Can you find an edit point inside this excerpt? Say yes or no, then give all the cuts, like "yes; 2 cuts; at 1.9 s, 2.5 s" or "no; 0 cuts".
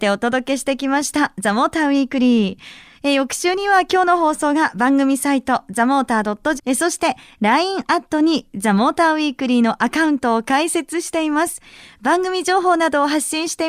yes; 1 cut; at 6.6 s